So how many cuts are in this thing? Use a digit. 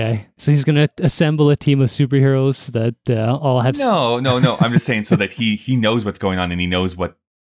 0